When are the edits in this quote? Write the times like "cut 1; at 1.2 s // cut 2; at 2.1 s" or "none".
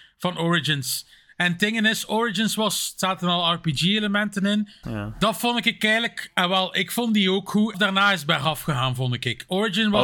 cut 1; at 4.8 s // cut 2; at 7.7 s